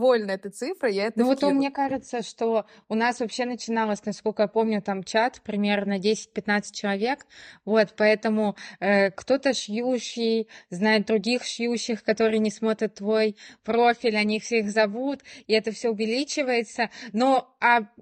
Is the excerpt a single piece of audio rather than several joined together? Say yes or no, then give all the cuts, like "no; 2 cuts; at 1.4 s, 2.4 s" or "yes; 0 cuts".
yes; 0 cuts